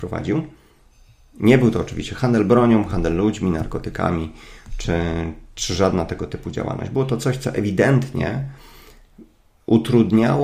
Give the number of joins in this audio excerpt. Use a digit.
0